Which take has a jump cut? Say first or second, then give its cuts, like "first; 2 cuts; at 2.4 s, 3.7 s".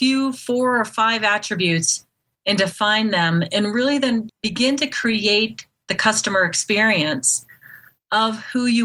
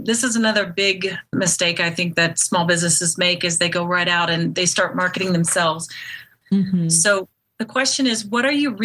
second; 1 cut; at 6.4 s